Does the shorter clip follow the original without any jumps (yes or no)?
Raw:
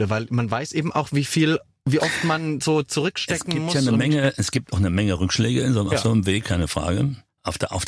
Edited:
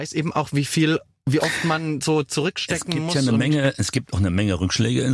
yes